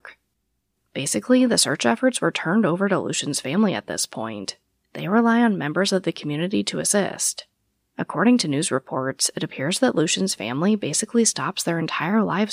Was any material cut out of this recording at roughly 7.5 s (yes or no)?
no